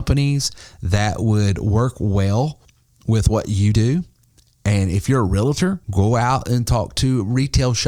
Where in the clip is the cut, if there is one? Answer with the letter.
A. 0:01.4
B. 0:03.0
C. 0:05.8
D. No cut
C